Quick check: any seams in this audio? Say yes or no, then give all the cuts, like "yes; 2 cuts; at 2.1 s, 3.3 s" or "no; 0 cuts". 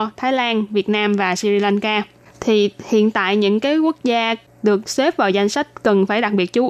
yes; 1 cut; at 2.3 s